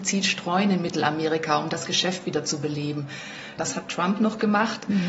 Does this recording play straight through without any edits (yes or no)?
no